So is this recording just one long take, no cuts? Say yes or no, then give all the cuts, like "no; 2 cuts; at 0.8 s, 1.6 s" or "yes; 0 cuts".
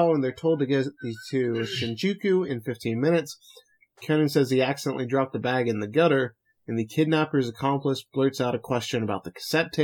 yes; 0 cuts